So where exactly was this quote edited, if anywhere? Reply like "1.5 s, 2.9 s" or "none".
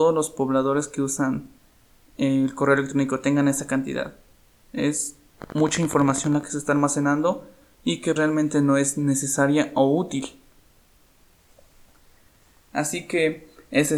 8.2 s